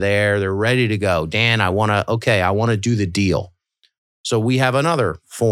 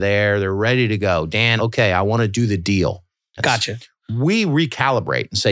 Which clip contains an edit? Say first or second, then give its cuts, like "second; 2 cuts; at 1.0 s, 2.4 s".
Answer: second; 2 cuts; at 1.6 s, 3.4 s